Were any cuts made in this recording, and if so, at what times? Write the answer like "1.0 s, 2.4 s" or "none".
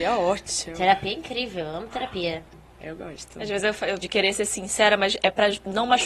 4.0 s